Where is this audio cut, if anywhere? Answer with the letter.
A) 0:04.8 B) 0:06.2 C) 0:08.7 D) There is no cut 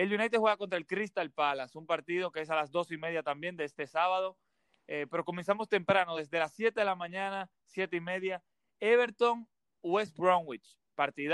D